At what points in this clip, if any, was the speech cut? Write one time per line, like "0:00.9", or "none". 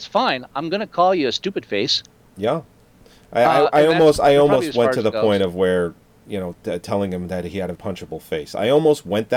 0:07.8